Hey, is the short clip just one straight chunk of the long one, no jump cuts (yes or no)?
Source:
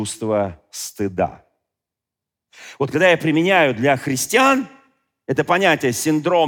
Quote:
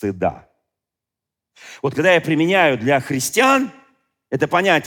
yes